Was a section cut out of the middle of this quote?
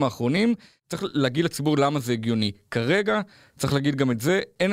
no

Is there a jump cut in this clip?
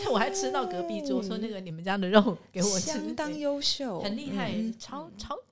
no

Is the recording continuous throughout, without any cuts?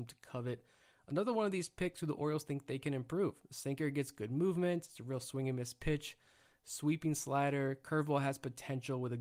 yes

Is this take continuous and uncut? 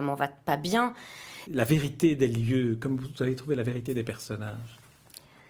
no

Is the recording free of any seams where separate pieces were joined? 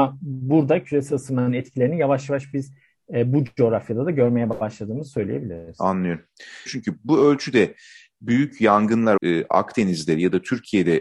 no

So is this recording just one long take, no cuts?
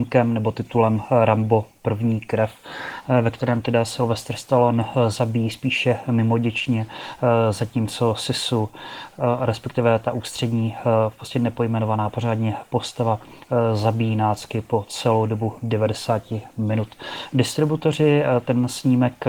yes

